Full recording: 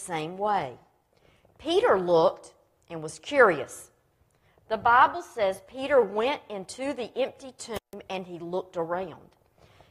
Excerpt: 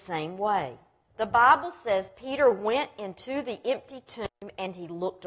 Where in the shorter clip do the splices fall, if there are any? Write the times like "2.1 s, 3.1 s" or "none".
1.1 s